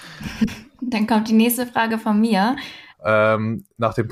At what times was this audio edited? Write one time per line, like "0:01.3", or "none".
0:02.9